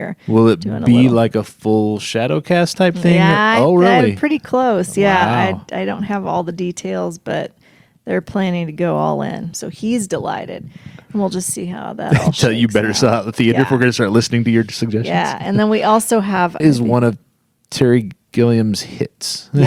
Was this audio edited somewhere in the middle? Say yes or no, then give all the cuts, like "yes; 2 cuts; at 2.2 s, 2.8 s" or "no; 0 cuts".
yes; 2 cuts; at 9.5 s, 16.6 s